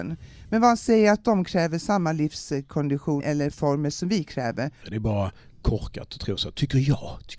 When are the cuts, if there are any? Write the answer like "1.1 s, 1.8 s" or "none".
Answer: 3.2 s, 4.8 s